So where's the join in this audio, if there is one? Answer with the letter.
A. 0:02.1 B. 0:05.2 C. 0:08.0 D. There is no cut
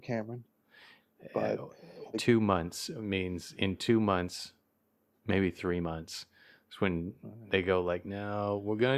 A